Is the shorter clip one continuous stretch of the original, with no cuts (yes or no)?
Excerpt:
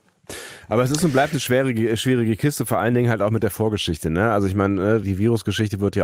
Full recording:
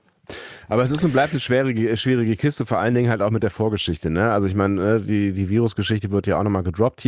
no